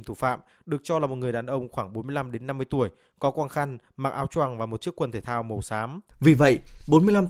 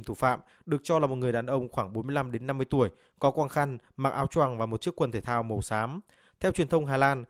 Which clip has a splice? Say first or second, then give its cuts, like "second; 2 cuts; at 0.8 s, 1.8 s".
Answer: first; 1 cut; at 6.1 s